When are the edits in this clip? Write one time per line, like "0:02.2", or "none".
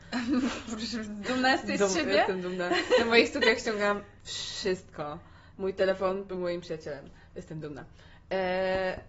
none